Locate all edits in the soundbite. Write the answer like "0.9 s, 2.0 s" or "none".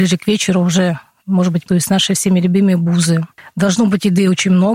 1.6 s

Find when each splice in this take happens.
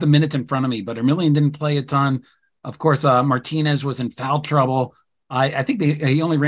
none

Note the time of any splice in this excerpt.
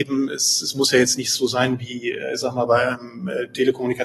none

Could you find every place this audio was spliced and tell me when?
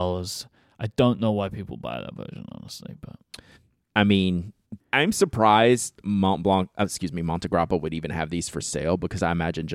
4.8 s

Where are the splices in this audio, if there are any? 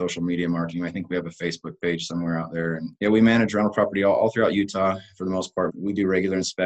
3.0 s, 5.7 s

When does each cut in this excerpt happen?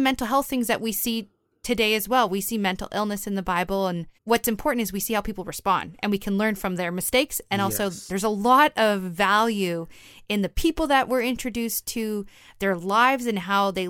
4.1 s, 8.1 s

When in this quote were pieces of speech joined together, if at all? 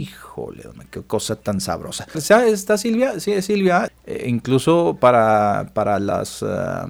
2.1 s, 3.9 s

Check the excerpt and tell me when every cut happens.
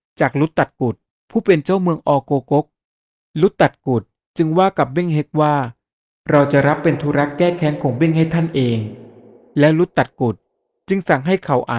none

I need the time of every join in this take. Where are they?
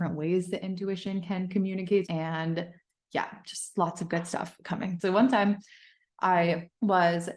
2.1 s, 5.0 s

